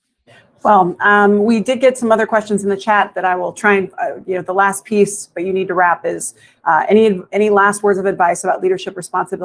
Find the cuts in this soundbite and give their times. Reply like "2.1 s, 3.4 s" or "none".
none